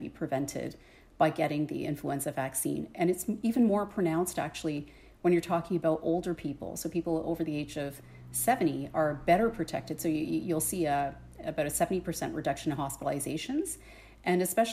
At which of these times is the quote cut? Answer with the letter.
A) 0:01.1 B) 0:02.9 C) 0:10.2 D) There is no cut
D